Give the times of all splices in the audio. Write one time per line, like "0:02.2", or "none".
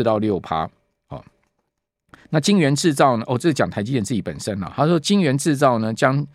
none